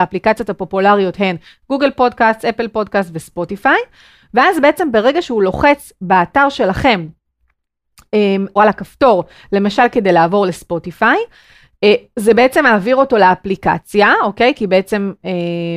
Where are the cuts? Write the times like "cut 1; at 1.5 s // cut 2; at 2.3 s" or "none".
cut 1; at 8.6 s

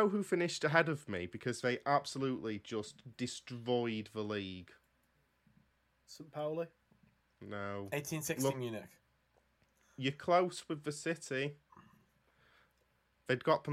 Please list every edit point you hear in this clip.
none

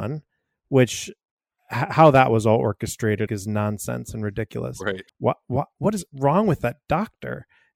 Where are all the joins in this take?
cut 1; at 3.3 s // cut 2; at 5.1 s

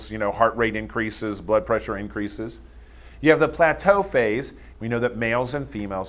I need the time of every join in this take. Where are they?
cut 1; at 4.7 s

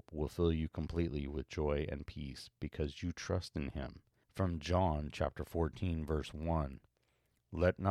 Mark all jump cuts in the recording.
cut 1; at 4.2 s

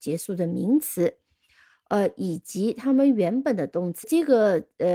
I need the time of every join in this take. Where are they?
cut 1; at 4.0 s

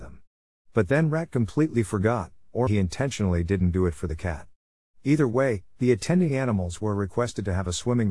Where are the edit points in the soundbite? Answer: cut 1; at 2.7 s

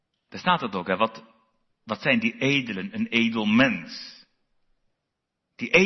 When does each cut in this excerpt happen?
none

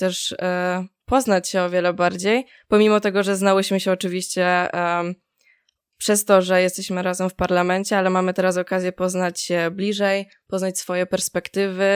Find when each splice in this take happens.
none

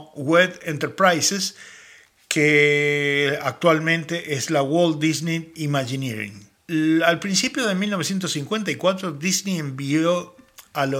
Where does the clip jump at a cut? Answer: none

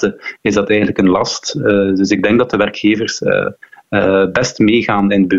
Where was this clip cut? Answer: none

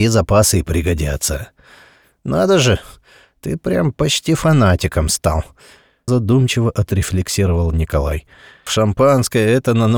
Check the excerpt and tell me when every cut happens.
cut 1; at 6.1 s // cut 2; at 8.7 s

